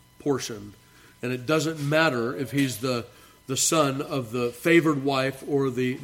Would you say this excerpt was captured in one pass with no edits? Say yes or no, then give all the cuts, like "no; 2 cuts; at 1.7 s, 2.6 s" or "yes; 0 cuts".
yes; 0 cuts